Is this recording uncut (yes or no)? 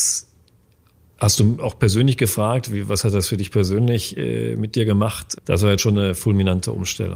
yes